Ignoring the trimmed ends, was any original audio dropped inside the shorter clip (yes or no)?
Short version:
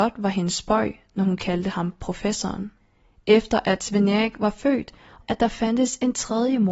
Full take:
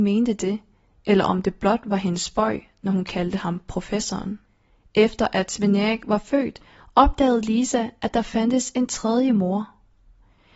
yes